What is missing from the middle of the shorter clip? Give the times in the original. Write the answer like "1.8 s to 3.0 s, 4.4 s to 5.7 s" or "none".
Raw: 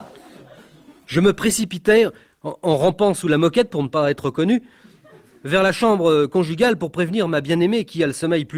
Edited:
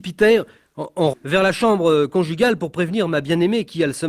2.8 s to 5.3 s